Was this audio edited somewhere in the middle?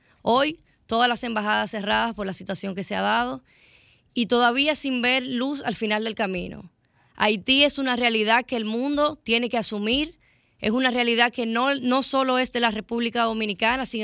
no; 0 cuts

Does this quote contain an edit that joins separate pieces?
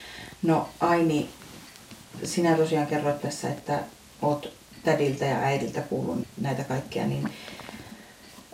yes; 1 cut; at 6.2 s

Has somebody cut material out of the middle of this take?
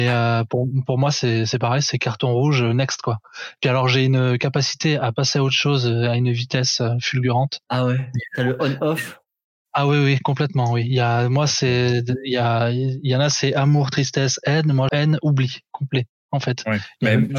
yes; 1 cut; at 14.9 s

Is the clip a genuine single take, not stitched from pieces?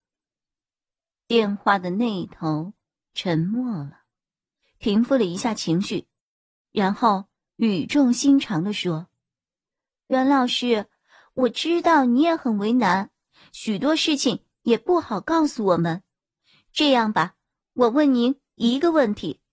no; 1 cut; at 4.6 s

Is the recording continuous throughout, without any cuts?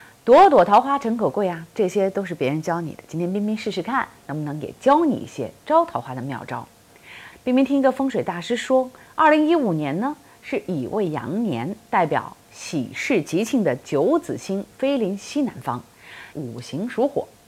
no; 2 cuts; at 7.3 s, 16.3 s

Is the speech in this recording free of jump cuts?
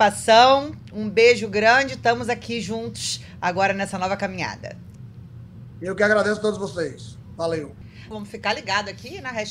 no; 1 cut; at 8.1 s

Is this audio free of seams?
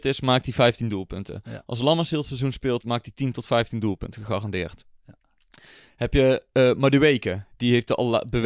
yes; 0 cuts

